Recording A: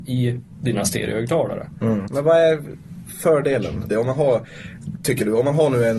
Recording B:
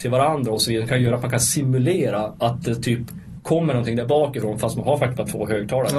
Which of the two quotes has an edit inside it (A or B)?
A